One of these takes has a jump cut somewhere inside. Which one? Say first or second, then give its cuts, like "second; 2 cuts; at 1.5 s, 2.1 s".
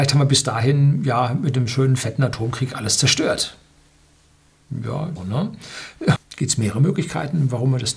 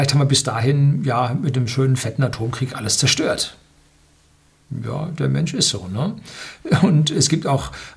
first; 2 cuts; at 5.2 s, 6.2 s